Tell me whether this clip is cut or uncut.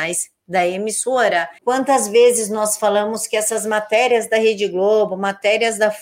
cut